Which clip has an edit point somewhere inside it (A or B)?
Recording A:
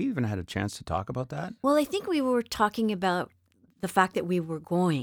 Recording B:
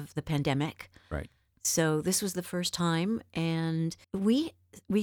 B